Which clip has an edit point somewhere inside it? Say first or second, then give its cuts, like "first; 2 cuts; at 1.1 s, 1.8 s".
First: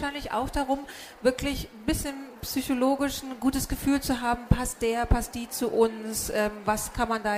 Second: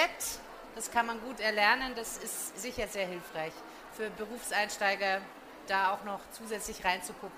second; 1 cut; at 5.7 s